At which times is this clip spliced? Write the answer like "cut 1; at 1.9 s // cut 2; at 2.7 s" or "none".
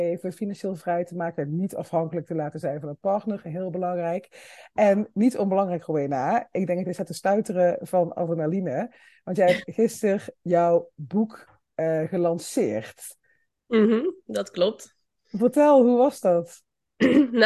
none